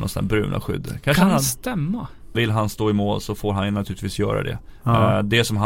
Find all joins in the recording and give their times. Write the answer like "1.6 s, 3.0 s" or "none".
2.3 s